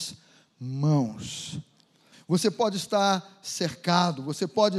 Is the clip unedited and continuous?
no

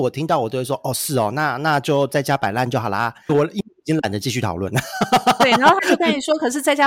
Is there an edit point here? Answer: yes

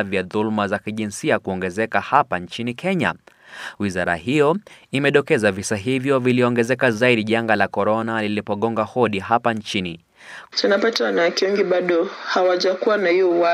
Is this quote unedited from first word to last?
no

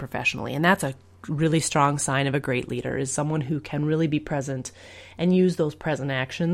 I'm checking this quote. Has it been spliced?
no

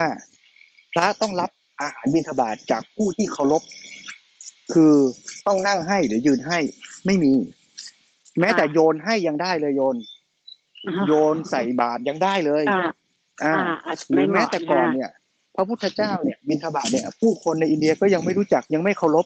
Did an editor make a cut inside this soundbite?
no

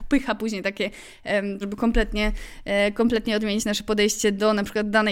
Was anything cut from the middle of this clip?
yes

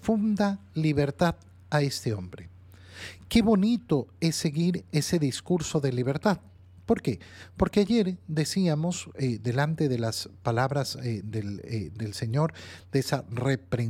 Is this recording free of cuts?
yes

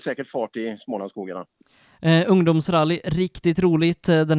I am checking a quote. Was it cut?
no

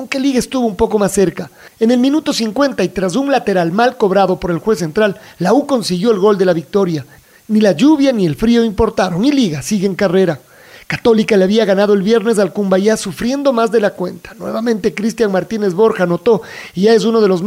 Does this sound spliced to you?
no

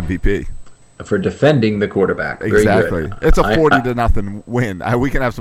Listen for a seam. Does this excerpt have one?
no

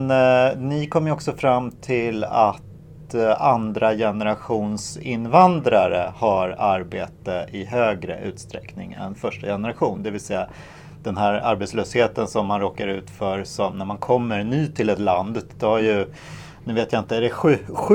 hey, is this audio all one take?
yes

